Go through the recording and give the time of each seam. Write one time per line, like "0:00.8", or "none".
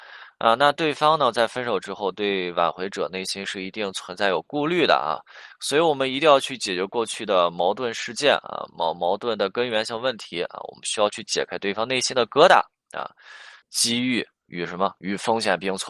0:13.6